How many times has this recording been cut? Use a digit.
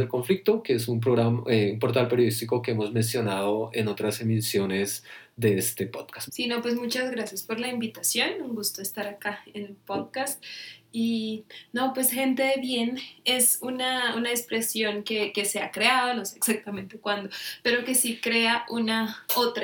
1